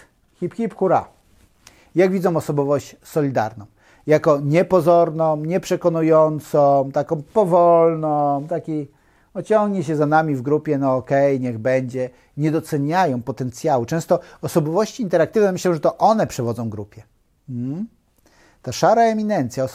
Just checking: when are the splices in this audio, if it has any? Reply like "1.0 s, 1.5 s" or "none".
none